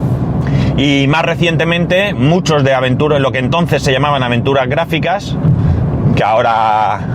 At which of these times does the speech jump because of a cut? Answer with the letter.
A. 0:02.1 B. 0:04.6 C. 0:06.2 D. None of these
A